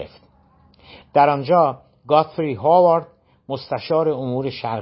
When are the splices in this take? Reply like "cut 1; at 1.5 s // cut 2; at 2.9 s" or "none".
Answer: cut 1; at 1.0 s